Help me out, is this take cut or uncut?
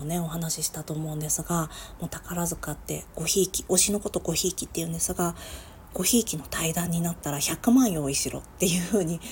cut